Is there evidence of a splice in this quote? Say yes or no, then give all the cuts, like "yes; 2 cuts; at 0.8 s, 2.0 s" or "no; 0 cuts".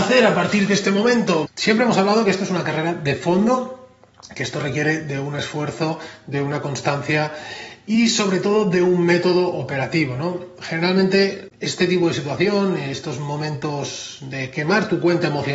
yes; 1 cut; at 1.5 s